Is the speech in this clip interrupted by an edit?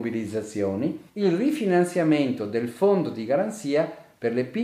yes; 1 cut; at 1.1 s

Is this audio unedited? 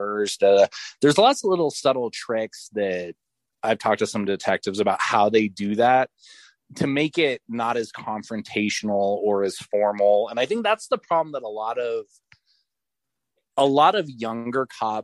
yes; 0 cuts

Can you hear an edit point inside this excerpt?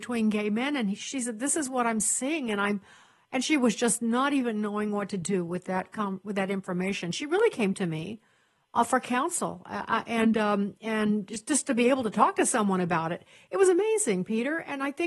no; 0 cuts

